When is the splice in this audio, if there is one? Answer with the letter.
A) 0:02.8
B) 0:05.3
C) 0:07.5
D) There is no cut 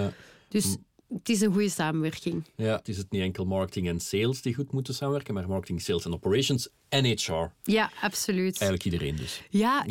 A